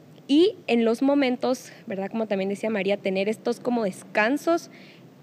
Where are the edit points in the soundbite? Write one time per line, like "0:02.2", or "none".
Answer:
none